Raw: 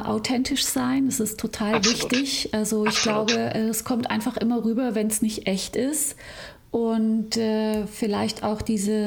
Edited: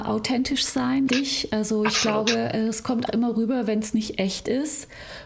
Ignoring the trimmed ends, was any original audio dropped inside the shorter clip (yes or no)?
yes